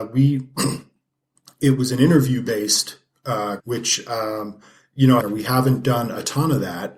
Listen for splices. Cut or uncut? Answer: cut